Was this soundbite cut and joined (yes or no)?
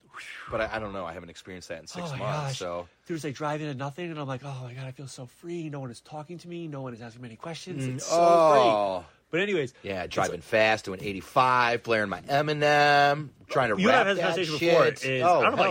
no